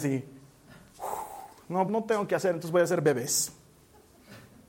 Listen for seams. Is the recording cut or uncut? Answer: cut